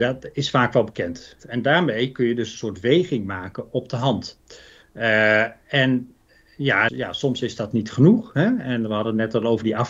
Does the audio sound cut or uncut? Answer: cut